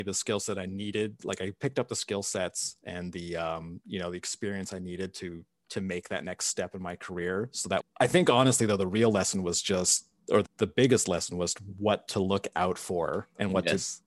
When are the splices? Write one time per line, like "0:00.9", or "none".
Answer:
0:07.8
0:10.4